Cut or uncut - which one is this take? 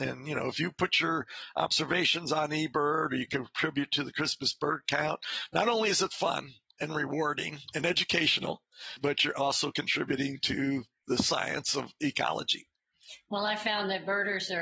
uncut